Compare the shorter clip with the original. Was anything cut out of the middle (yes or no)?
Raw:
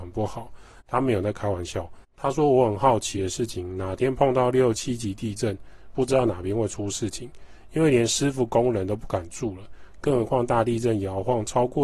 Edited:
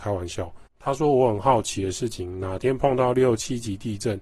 no